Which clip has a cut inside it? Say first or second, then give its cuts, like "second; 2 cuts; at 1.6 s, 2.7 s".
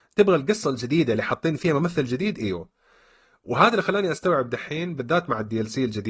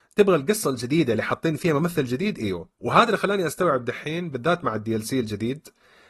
second; 1 cut; at 2.7 s